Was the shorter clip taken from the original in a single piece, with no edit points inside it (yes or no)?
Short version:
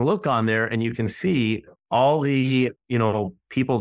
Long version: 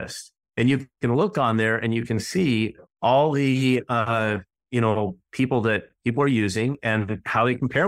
no